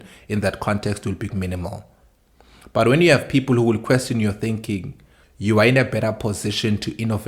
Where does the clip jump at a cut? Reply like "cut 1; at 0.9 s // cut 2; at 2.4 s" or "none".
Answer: cut 1; at 1.3 s // cut 2; at 5.2 s